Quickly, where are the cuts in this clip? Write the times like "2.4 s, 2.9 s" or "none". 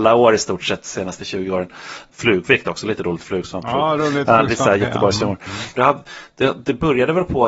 2.1 s, 5.8 s

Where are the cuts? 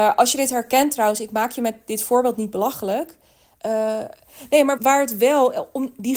3.6 s, 4.8 s

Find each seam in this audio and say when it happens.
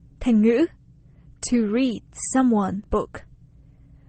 2.9 s

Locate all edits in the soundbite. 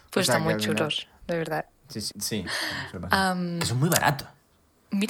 2.1 s

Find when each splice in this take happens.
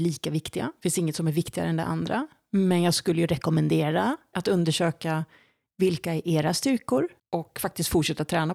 4.3 s, 7.2 s

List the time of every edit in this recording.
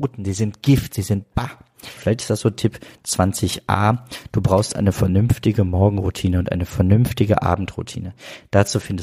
2.0 s

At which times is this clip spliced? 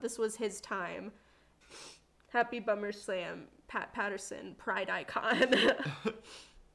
1.6 s

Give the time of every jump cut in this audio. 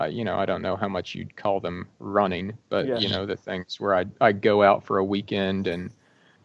none

